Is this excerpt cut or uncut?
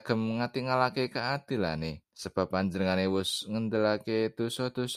cut